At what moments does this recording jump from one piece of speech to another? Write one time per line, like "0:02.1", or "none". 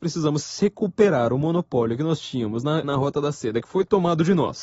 0:02.8